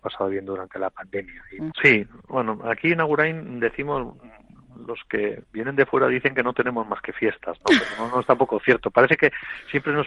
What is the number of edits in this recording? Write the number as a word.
two